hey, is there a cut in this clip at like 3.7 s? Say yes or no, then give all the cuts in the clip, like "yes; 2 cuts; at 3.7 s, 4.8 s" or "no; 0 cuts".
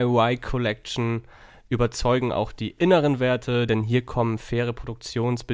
no; 0 cuts